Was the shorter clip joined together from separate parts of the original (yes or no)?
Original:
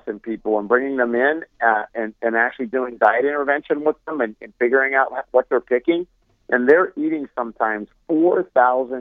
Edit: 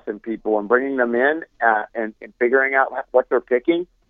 yes